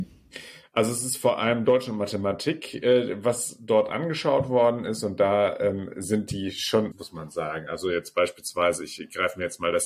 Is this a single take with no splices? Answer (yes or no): no